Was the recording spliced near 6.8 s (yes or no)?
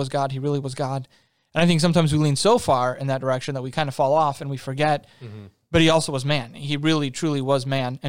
no